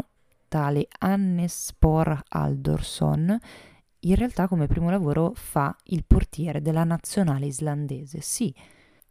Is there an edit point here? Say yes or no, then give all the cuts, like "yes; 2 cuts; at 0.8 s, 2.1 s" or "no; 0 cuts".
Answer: no; 0 cuts